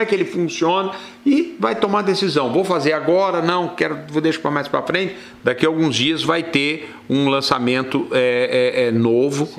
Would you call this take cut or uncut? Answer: cut